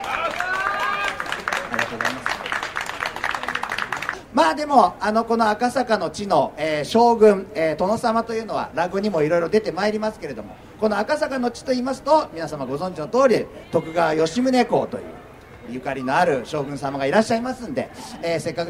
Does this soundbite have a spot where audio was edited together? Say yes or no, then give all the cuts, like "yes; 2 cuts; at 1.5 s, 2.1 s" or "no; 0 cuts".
yes; 1 cut; at 15.7 s